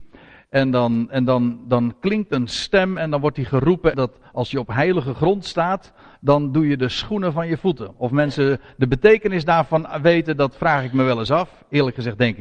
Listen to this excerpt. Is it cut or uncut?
cut